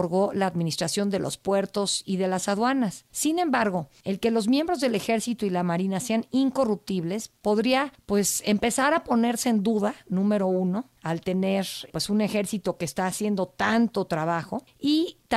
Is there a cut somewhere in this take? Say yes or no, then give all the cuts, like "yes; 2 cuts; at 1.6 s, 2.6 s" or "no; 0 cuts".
no; 0 cuts